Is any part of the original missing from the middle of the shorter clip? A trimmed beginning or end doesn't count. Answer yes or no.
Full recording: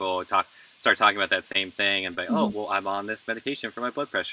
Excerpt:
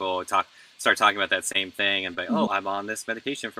yes